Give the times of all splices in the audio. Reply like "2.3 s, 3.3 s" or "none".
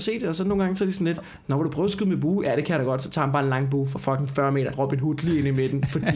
4.7 s